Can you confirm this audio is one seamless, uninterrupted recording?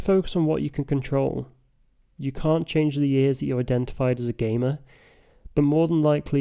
yes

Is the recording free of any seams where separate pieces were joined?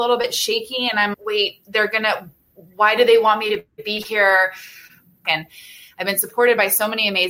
no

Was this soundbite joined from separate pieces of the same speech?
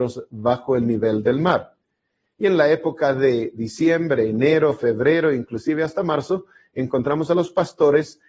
no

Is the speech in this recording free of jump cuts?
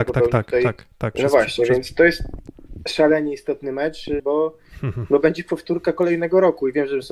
no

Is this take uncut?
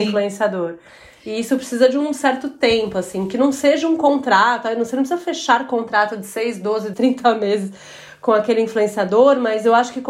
no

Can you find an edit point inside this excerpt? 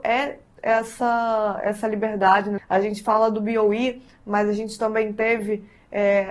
yes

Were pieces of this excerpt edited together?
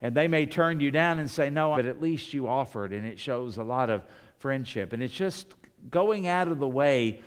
yes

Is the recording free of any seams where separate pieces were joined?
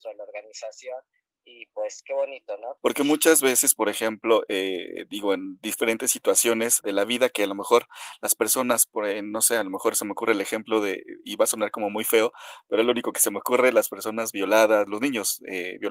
no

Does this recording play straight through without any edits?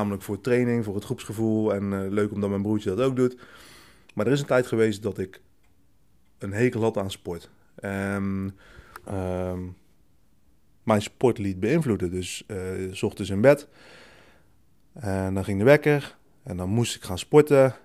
no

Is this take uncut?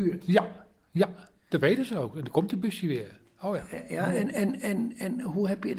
yes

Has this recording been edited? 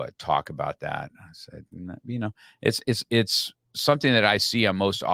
no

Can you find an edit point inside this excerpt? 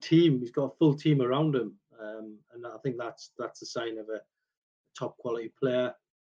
no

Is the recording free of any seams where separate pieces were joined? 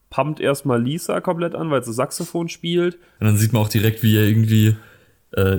no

